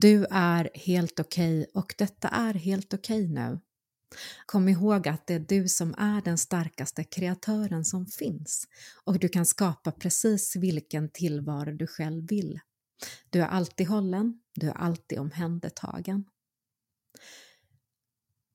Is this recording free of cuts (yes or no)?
no